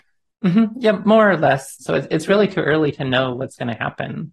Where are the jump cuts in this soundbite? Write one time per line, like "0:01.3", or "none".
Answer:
0:01.8